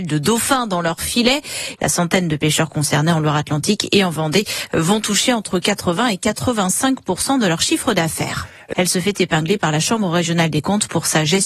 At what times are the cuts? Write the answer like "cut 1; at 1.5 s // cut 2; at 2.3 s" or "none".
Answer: cut 1; at 1.8 s // cut 2; at 8.7 s